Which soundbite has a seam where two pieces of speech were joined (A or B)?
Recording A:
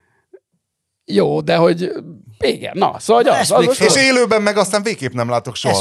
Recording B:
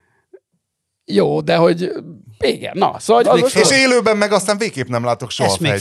B